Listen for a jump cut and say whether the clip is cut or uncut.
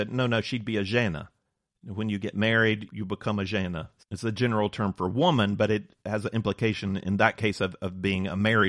cut